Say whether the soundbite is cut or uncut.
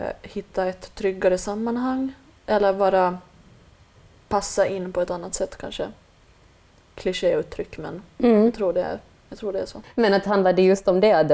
uncut